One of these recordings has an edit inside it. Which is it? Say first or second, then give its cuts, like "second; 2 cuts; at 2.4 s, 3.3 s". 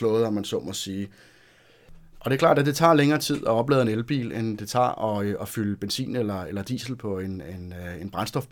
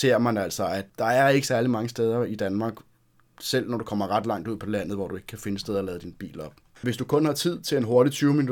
second; 1 cut; at 6.8 s